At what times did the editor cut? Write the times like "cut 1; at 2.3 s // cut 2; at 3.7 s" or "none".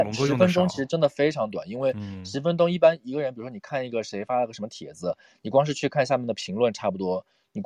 none